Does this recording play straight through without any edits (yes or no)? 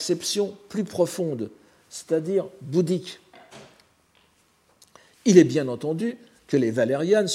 yes